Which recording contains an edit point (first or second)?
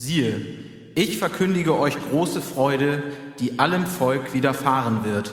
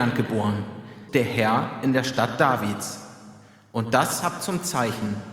second